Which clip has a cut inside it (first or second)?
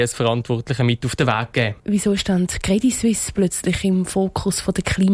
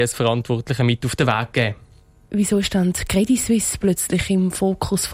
first